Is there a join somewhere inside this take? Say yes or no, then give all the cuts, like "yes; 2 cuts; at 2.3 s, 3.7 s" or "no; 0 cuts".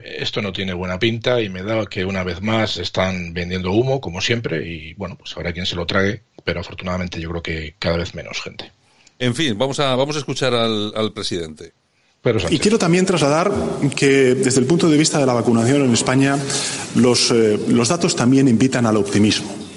no; 0 cuts